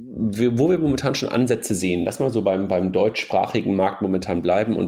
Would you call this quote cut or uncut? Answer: uncut